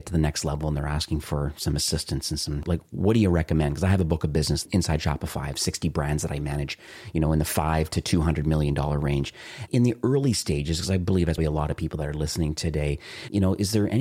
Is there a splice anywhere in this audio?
yes; 2 cuts; at 9.7 s, 11.4 s

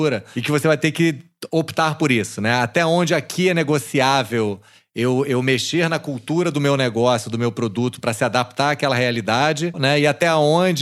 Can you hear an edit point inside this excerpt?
yes; 1 cut; at 9.7 s

